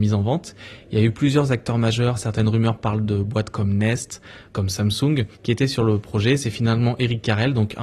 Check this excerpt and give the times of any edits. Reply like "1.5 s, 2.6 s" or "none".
5.3 s

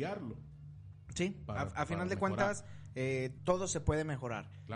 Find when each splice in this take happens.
3.4 s

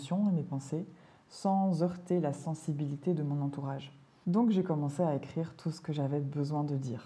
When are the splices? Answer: 4.2 s

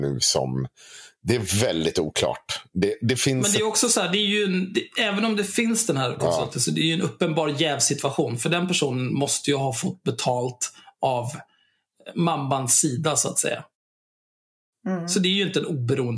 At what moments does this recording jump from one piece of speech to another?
none

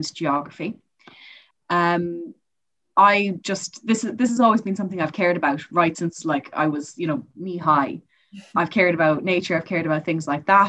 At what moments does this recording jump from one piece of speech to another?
1.5 s

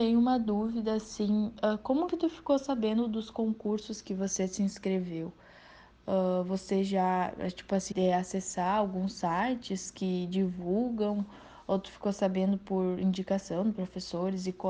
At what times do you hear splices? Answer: 7.9 s

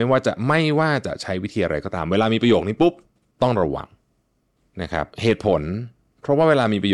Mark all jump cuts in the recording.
5.1 s

